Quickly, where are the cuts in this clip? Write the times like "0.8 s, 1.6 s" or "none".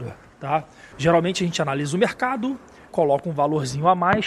0.9 s, 2.9 s